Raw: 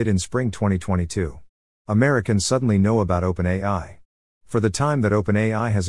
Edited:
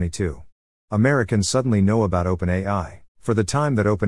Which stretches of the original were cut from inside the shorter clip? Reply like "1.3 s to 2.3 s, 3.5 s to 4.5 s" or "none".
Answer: 4.0 s to 4.3 s